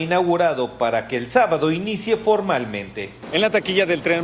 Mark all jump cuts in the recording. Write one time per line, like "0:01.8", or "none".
none